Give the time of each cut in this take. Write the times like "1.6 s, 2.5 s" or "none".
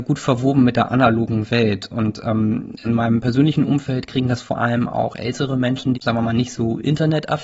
2.8 s, 5.9 s